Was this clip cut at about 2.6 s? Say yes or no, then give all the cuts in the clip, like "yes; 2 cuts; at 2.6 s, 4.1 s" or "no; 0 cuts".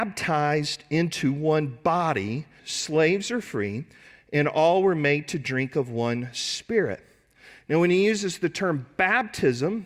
yes; 1 cut; at 2.6 s